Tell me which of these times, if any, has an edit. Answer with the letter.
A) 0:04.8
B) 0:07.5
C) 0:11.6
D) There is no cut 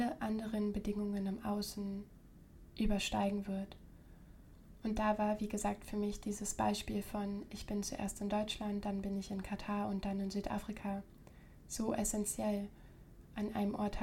A